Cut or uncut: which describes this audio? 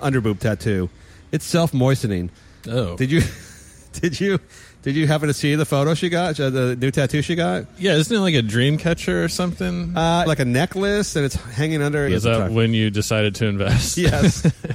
cut